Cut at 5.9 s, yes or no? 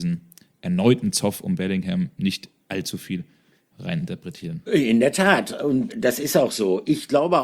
yes